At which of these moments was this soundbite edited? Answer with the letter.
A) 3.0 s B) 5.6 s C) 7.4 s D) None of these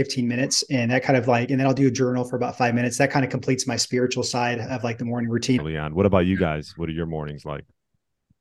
B